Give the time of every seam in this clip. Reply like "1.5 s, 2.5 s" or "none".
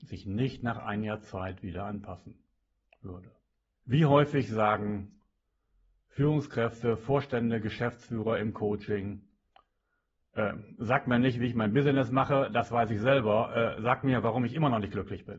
3.7 s